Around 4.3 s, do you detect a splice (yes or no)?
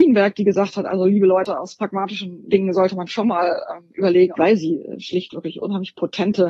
yes